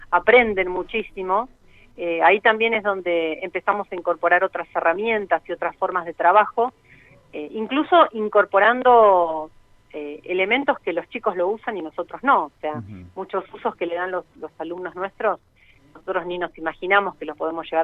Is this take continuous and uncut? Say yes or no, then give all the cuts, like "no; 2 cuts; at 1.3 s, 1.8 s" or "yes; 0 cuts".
yes; 0 cuts